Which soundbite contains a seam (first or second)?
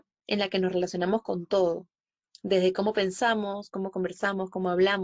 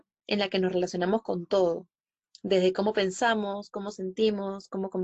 first